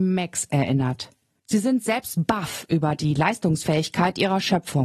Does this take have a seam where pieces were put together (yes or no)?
yes